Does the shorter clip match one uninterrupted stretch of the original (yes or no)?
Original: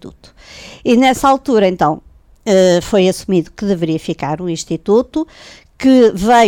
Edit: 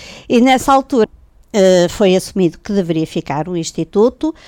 no